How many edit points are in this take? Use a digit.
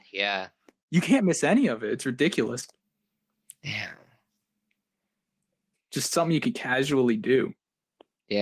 1